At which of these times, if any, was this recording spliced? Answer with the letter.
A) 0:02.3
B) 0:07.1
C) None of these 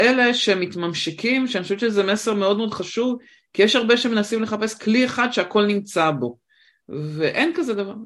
C